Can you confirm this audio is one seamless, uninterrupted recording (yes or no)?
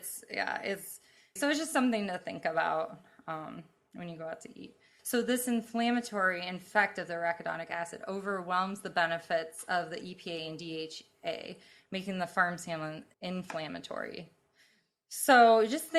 no